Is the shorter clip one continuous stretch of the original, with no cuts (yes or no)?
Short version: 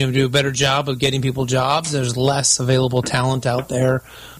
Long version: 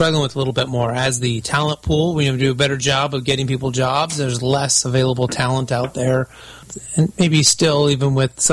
yes